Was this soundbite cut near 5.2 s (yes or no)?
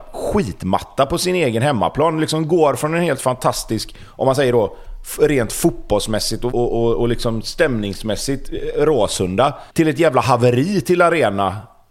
no